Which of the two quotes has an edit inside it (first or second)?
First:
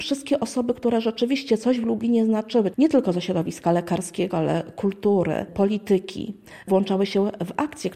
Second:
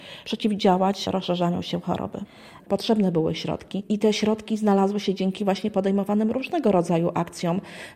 second